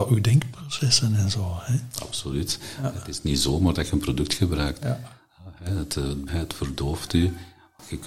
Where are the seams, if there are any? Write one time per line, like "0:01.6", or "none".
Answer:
0:04.8
0:06.3